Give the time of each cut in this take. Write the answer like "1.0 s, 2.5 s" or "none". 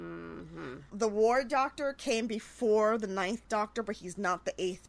none